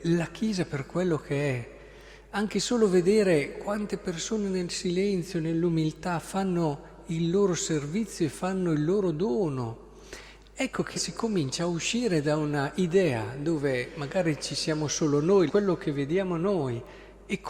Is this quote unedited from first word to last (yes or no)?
no